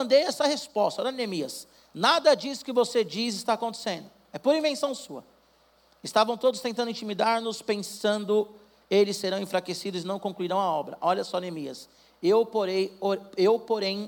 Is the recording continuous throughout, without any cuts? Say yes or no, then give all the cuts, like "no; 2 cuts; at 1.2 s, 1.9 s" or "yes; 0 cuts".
yes; 0 cuts